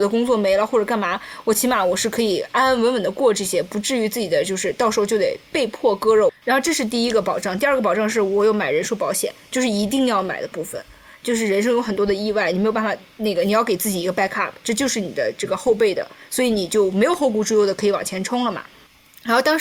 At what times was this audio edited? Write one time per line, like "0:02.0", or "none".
0:06.3